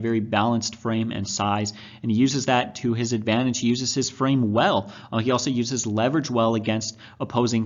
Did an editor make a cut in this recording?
no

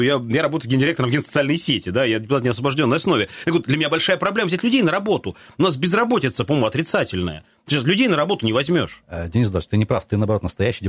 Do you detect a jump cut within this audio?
no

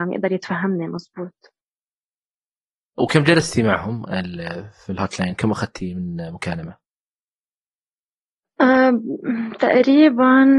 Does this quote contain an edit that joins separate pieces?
no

